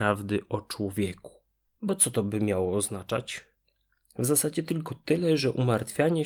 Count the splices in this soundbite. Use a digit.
1